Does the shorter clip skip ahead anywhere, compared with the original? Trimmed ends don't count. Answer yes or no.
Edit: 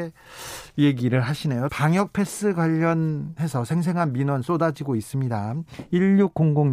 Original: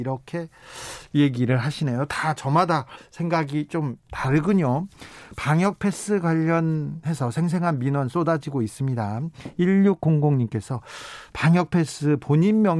yes